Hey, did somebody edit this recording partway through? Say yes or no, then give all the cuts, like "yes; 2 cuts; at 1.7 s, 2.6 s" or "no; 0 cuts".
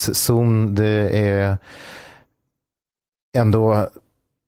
no; 0 cuts